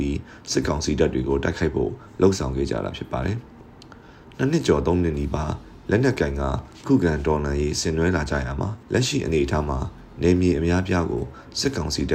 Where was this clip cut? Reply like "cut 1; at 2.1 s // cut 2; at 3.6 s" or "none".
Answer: cut 1; at 8.8 s